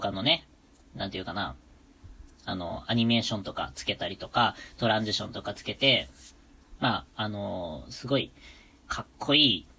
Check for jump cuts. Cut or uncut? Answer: cut